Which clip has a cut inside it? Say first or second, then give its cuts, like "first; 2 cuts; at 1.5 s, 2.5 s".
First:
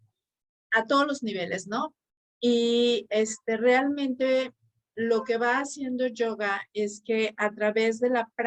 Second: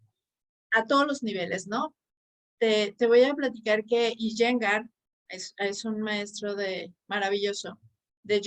first; 1 cut; at 2.3 s